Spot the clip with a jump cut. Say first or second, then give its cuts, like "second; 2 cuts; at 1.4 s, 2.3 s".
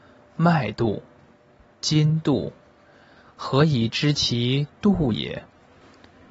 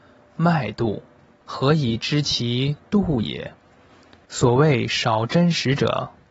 second; 2 cuts; at 1.4 s, 4.3 s